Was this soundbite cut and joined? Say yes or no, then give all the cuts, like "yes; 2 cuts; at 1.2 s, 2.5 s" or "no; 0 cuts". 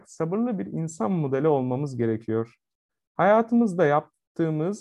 no; 0 cuts